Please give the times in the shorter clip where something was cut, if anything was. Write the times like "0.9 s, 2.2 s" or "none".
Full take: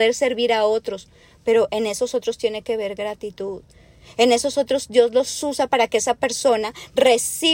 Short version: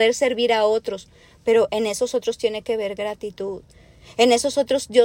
none